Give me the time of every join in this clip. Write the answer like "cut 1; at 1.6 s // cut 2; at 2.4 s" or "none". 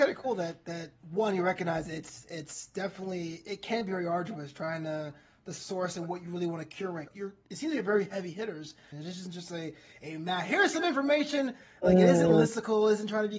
cut 1; at 7.1 s // cut 2; at 8.9 s